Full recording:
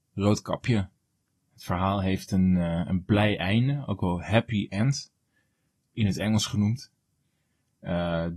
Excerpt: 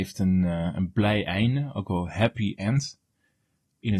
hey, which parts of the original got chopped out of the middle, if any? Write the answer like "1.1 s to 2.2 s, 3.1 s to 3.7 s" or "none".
none